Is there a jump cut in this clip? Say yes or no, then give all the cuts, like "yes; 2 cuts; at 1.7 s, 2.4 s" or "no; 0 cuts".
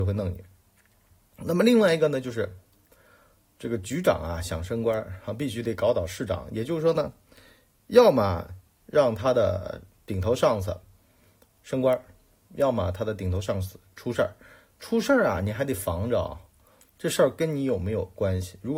no; 0 cuts